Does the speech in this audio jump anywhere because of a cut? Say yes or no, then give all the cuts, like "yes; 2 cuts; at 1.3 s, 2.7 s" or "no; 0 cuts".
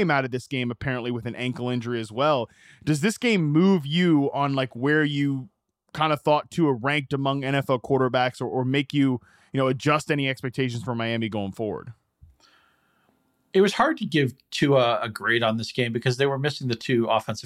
no; 0 cuts